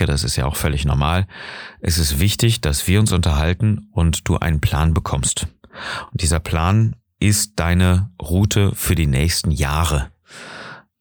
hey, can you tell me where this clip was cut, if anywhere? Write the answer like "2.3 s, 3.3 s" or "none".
none